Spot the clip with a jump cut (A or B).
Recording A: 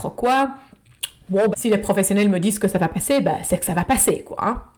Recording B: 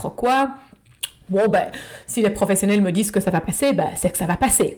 A